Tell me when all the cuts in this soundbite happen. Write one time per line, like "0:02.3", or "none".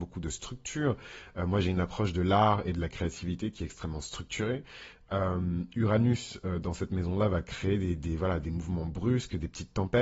none